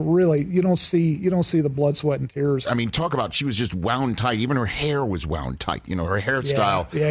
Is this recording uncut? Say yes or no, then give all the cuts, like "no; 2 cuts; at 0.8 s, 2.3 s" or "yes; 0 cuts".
no; 1 cut; at 2.6 s